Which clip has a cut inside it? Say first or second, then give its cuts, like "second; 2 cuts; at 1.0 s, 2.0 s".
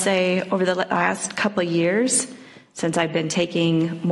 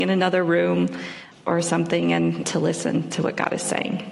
second; 2 cuts; at 1.3 s, 2.4 s